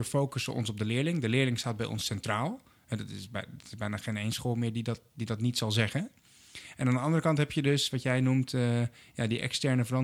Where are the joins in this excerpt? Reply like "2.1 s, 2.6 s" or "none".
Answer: none